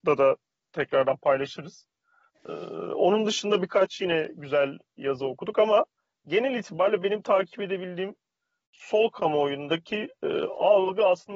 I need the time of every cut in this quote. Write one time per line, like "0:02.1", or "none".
none